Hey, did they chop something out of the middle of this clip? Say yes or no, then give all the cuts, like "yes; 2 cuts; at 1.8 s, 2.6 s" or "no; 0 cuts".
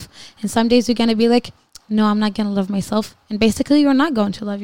no; 0 cuts